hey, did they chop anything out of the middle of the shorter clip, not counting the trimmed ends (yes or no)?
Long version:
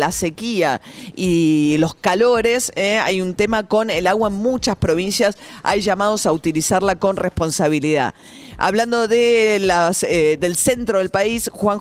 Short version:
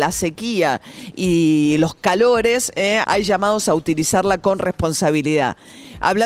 yes